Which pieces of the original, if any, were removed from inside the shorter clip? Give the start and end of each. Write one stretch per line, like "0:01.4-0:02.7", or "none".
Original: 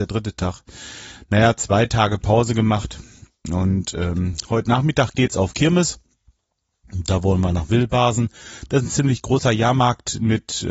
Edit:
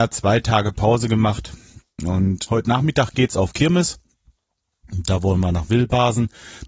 0:03.9-0:04.5